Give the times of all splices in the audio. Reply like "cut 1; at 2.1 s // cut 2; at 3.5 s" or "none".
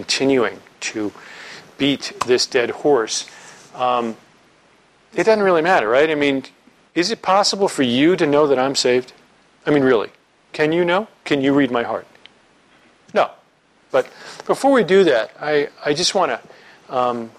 cut 1; at 13.9 s